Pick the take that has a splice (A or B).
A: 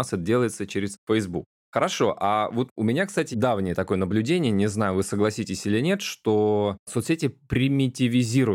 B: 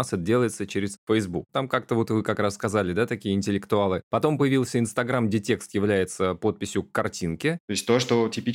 B